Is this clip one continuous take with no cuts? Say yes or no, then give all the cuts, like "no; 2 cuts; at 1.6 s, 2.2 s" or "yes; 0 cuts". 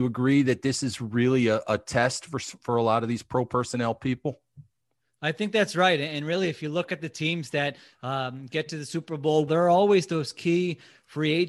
no; 1 cut; at 9.5 s